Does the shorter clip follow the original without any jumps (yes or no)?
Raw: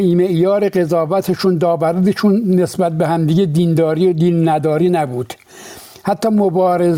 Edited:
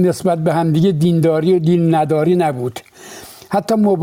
yes